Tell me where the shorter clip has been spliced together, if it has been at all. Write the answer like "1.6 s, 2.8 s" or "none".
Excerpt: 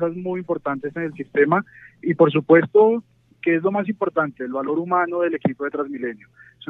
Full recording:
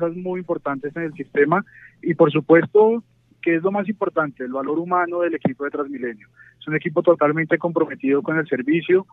none